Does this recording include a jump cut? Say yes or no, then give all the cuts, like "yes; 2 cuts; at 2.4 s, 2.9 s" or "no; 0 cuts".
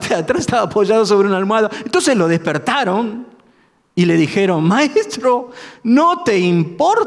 no; 0 cuts